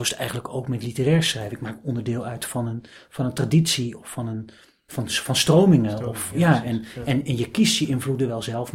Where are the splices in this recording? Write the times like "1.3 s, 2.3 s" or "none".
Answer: none